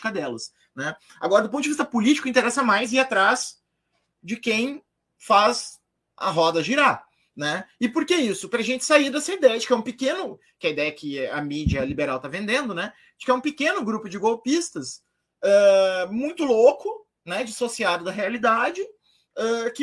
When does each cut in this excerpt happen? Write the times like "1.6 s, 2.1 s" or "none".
none

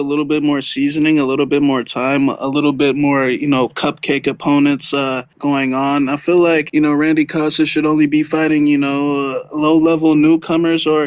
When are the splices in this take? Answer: none

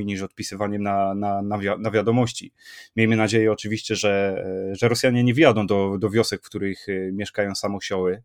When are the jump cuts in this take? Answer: none

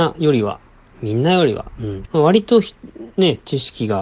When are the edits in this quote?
2.1 s

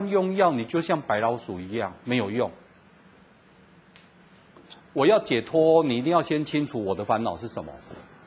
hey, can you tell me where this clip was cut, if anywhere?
4.8 s

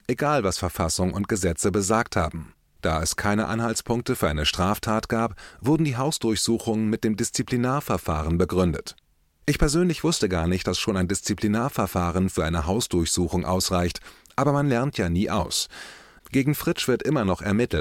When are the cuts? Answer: 2.7 s

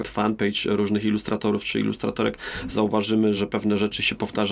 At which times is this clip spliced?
3.4 s

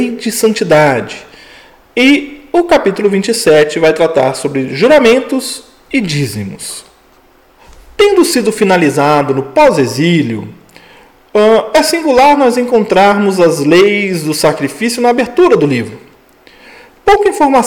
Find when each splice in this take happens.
none

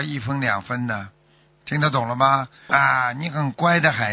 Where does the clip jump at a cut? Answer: 2.7 s

